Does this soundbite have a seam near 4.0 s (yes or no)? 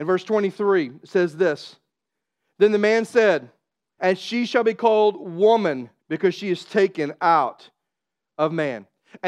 yes